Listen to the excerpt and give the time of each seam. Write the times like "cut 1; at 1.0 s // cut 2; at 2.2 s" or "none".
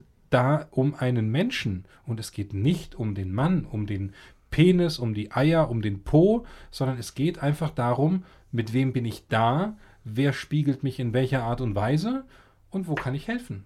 none

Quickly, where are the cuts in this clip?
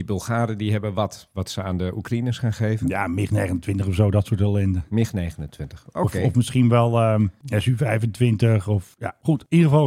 none

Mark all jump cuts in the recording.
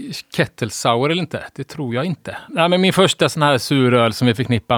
cut 1; at 2.5 s

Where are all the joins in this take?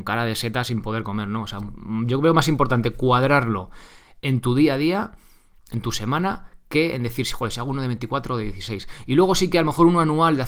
none

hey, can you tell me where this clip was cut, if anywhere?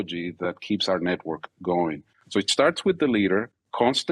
none

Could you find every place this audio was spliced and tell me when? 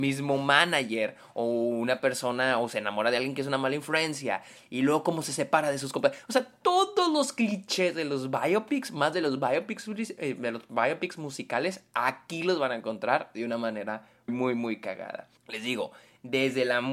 cut 1; at 14.3 s // cut 2; at 15.4 s

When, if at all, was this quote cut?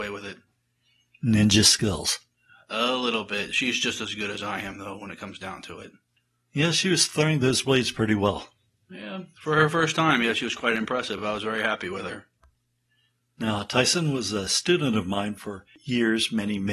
none

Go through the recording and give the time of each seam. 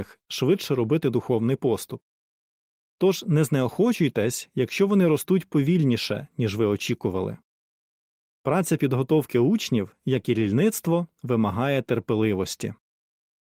none

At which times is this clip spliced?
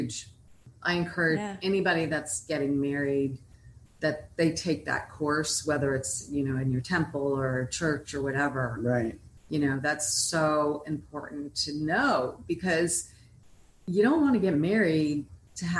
none

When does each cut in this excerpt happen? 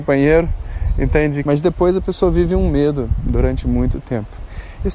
cut 1; at 1.4 s

